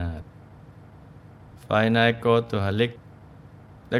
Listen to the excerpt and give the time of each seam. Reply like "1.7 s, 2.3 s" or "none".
none

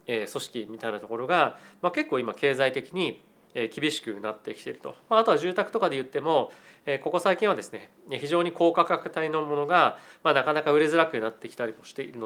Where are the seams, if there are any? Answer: none

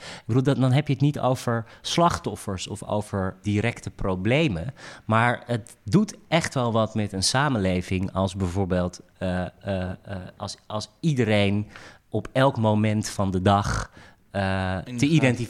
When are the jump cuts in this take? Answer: 3.4 s

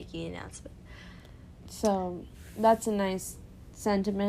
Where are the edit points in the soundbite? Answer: 1.6 s

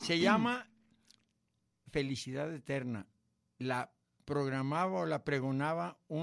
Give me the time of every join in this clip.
none

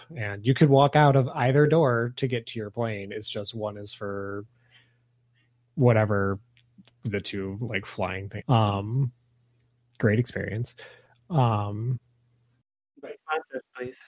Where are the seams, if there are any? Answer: 8.4 s

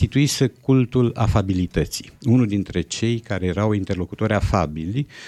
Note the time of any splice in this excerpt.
none

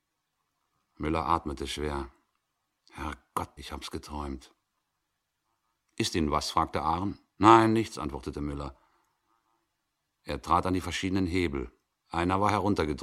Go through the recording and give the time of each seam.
3.6 s

